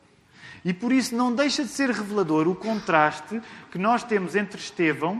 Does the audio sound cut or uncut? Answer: uncut